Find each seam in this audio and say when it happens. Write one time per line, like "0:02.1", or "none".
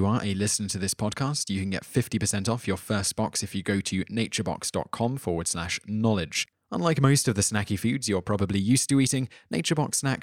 0:06.5